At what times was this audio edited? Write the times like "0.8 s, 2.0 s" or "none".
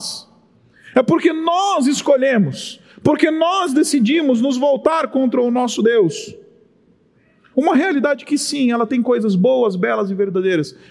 7.5 s